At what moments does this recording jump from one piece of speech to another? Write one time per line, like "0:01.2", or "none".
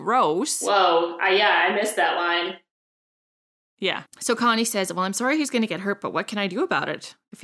0:04.1